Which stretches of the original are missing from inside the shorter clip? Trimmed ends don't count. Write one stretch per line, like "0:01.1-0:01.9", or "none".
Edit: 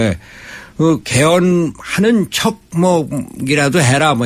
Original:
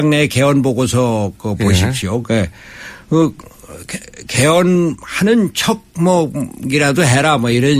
0:03.4-0:04.3